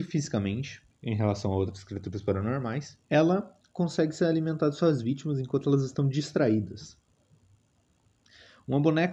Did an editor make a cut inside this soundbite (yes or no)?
yes